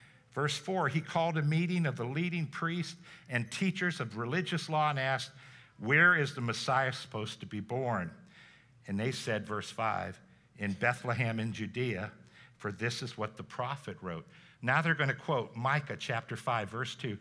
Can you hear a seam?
no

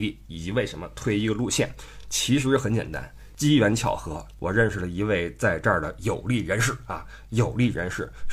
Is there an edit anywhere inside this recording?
no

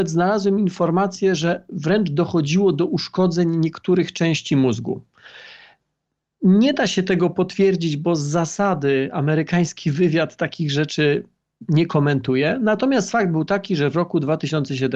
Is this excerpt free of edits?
yes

